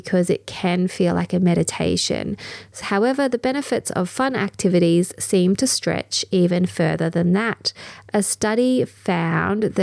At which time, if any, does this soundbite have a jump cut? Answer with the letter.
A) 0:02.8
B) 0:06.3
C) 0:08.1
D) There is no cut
A